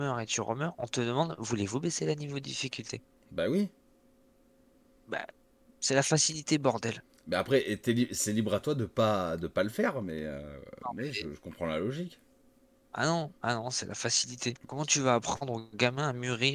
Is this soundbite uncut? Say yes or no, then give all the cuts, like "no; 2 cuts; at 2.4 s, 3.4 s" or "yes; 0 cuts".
no; 2 cuts; at 13.4 s, 14.6 s